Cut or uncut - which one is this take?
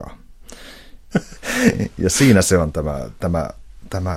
cut